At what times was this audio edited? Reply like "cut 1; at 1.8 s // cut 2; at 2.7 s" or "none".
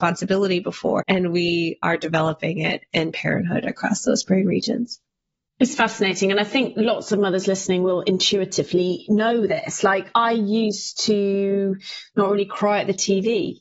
cut 1; at 1.0 s

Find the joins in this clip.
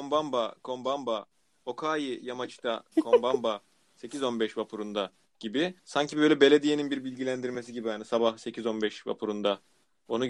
cut 1; at 2.9 s // cut 2; at 5.8 s

